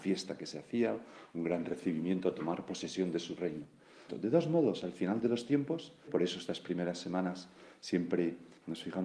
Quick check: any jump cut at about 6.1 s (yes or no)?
yes